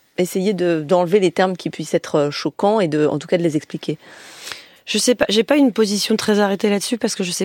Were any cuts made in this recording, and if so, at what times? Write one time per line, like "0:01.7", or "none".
none